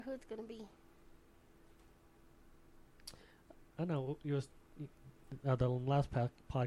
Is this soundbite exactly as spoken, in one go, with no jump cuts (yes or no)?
no